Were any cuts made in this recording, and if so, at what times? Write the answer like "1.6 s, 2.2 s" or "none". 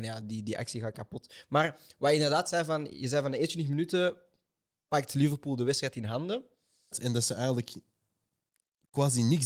6.9 s